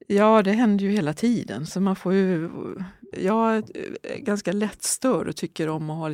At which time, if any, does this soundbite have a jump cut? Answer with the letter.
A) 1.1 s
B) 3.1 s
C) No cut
B